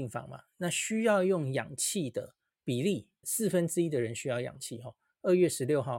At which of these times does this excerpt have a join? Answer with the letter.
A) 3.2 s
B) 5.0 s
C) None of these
A